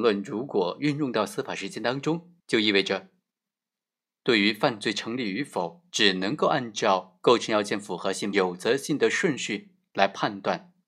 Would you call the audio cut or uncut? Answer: cut